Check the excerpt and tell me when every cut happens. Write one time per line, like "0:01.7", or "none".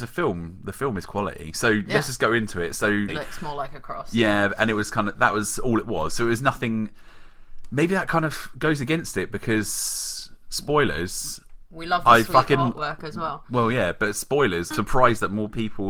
0:03.1
0:14.7